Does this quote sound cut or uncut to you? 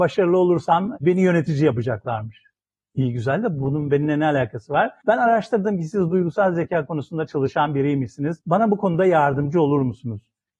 uncut